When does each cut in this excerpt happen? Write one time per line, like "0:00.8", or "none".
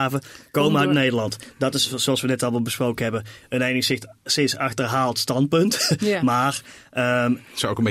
none